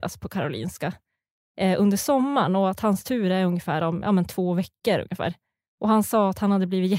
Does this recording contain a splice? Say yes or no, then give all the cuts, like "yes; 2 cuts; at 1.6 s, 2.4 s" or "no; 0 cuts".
no; 0 cuts